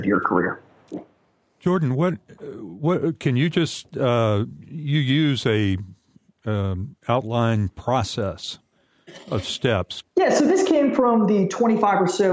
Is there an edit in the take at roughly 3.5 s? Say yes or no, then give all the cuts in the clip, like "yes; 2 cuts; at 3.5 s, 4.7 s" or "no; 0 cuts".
no; 1 cut; at 10.0 s